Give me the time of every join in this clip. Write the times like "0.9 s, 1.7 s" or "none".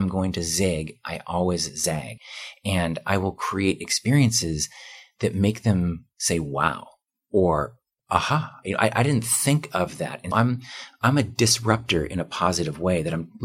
10.3 s